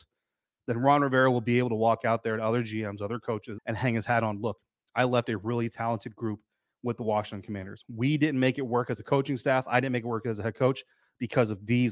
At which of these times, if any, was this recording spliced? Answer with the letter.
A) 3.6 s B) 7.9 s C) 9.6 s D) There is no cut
A